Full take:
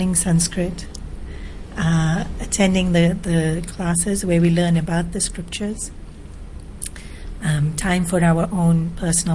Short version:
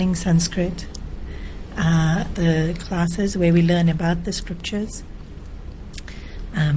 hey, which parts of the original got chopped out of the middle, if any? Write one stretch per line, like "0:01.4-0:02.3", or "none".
0:02.3-0:03.2